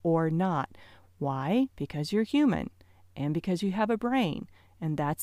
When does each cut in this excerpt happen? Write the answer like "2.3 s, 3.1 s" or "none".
1.7 s